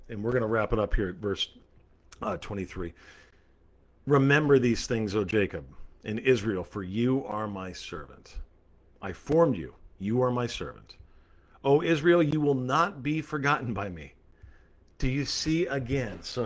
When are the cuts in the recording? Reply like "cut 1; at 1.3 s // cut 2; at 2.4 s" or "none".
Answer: none